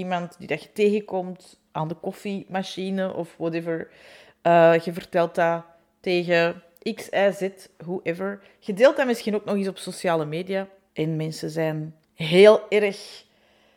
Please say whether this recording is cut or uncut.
cut